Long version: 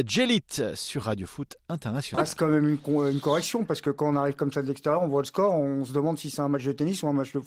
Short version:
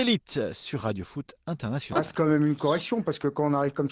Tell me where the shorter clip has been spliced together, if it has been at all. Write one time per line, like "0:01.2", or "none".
0:02.6